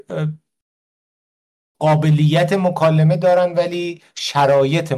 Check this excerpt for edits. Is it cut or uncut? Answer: uncut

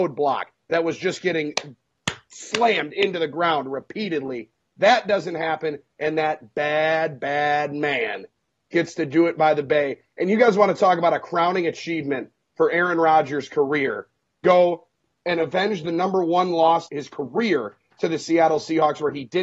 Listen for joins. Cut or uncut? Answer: cut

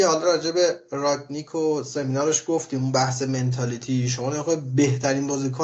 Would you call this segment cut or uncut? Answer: uncut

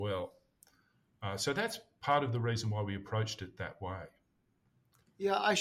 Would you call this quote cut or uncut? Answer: uncut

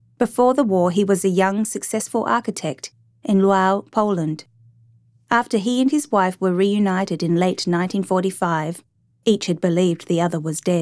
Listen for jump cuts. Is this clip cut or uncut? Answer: uncut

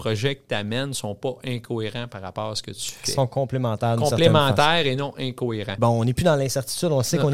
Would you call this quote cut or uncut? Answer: cut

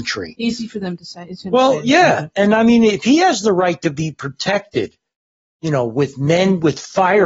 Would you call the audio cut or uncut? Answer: uncut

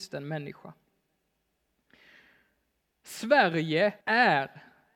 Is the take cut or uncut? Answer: cut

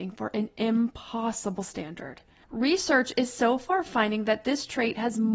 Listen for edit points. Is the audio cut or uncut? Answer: cut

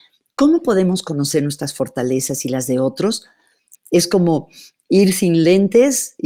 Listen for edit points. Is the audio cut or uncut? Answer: cut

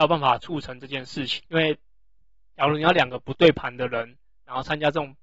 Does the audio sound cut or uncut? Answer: cut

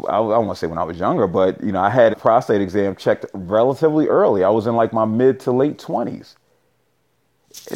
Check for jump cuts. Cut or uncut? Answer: cut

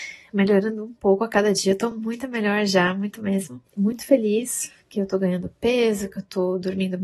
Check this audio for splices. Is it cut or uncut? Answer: uncut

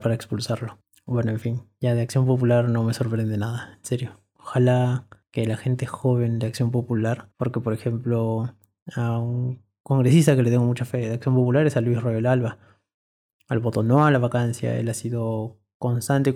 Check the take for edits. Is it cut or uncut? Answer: uncut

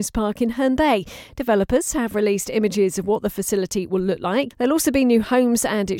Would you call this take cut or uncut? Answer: cut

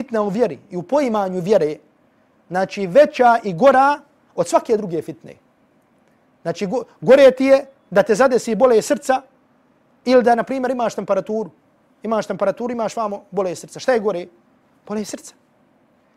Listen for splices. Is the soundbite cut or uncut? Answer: uncut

